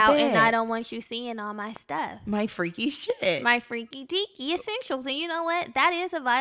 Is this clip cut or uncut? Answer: uncut